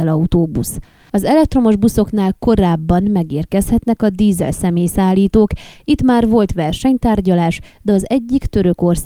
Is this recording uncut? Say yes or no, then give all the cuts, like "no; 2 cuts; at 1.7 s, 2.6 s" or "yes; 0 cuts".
no; 1 cut; at 1.1 s